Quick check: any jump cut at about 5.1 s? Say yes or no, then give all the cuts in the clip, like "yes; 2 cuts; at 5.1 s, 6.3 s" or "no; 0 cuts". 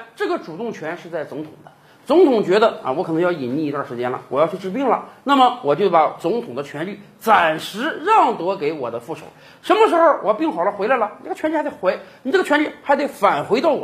no; 0 cuts